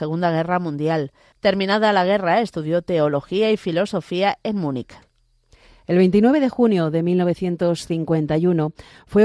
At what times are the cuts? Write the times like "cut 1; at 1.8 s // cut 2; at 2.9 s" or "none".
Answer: cut 1; at 1.3 s

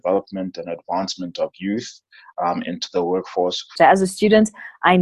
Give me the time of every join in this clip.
cut 1; at 3.8 s

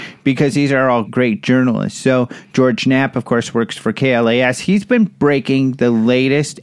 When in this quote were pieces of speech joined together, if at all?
cut 1; at 1.0 s

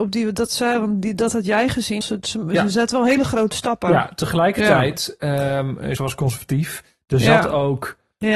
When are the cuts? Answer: cut 1; at 2.0 s // cut 2; at 6.0 s

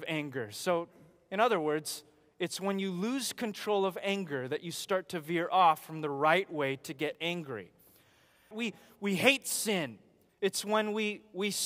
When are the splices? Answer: cut 1; at 8.5 s // cut 2; at 10.3 s

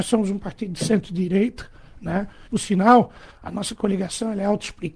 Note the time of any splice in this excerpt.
cut 1; at 2.5 s

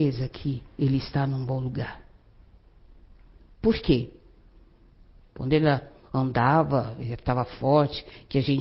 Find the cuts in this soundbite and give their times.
cut 1; at 5.3 s

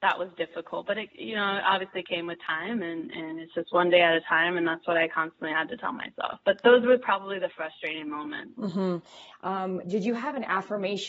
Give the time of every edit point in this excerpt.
cut 1; at 9.3 s

